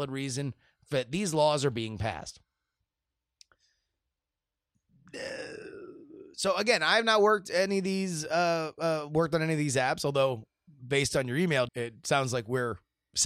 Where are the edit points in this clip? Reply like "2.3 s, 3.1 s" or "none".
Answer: 11.7 s

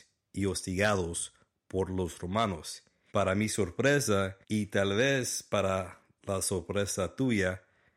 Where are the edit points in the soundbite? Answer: 3.1 s, 4.4 s

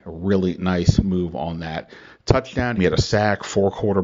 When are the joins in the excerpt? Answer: 2.8 s

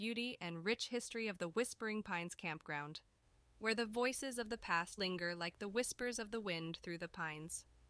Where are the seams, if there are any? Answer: 5.0 s

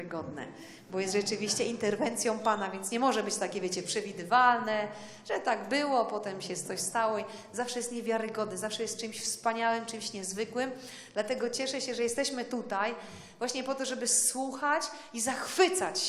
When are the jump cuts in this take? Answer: none

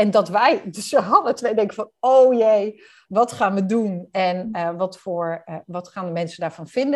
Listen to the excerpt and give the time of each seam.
none

